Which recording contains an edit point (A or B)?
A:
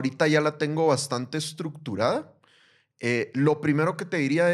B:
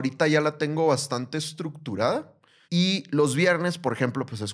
B